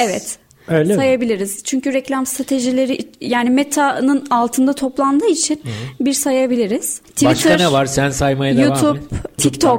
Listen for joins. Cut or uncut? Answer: uncut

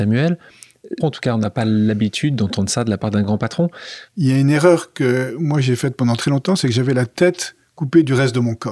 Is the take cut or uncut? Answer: cut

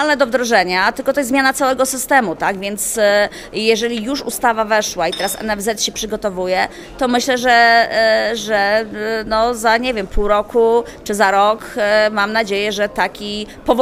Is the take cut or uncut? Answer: uncut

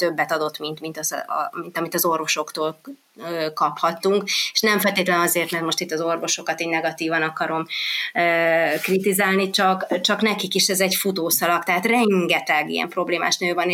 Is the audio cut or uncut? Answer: uncut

